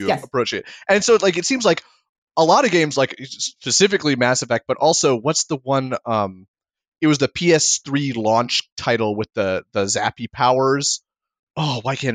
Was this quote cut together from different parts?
no; 0 cuts

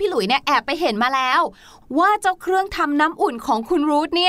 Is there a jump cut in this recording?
no; 0 cuts

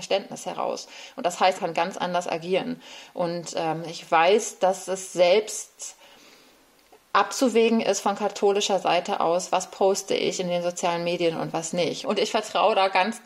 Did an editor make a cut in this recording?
yes; 2 cuts; at 1.6 s, 12.0 s

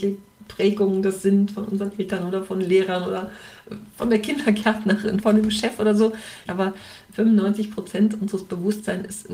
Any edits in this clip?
yes; 2 cuts; at 5.2 s, 6.5 s

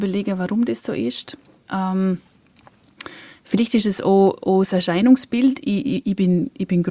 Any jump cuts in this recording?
no; 0 cuts

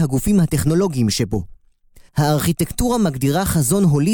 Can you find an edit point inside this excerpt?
yes; 1 cut; at 2.1 s

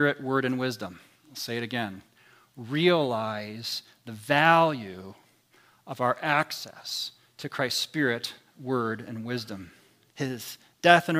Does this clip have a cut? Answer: yes; 1 cut; at 10.1 s

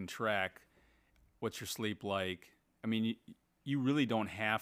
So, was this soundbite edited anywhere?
no; 0 cuts

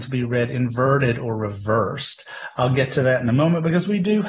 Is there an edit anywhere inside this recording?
no; 0 cuts

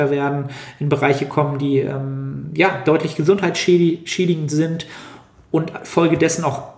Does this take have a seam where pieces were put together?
no; 0 cuts

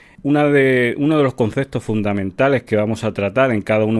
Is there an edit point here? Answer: no; 0 cuts

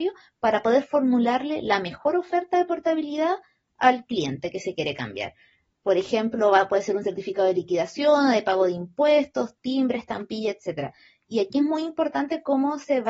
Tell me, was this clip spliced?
no; 0 cuts

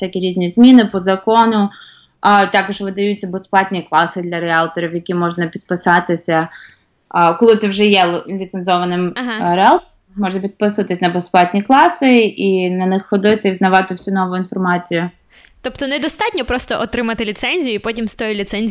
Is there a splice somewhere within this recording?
no; 0 cuts

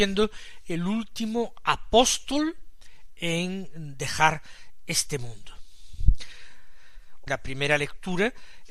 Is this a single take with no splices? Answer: no; 1 cut; at 7.3 s

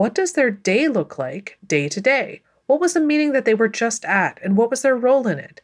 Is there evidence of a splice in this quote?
no; 0 cuts

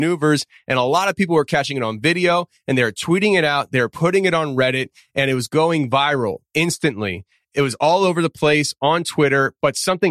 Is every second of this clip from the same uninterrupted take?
yes; 0 cuts

